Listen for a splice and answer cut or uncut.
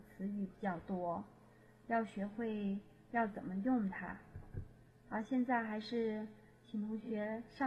uncut